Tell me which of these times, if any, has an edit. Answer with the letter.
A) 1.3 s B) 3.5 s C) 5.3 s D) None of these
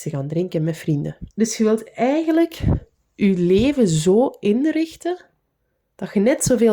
A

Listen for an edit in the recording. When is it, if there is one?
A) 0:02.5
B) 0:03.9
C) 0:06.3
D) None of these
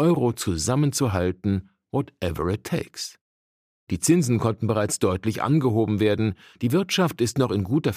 B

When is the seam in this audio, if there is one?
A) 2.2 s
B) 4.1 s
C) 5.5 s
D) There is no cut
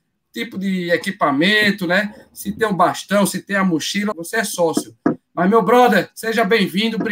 B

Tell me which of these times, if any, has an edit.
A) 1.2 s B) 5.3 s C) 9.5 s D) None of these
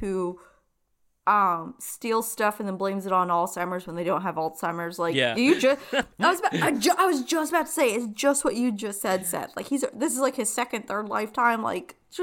B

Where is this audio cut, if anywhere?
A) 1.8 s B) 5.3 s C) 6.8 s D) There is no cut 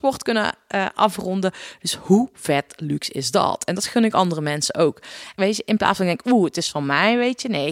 B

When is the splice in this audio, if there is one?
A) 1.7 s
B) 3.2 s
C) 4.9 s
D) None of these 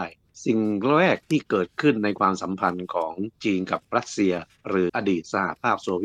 C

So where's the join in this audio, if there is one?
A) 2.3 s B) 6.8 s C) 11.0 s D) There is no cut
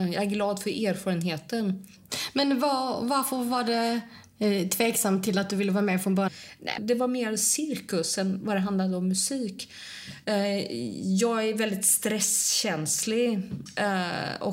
B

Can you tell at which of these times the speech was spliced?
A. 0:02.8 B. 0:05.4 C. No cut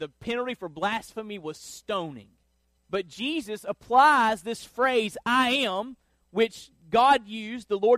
A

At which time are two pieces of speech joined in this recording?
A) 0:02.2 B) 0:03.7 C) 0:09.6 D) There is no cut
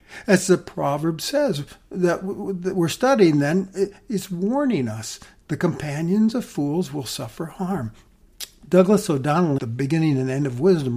C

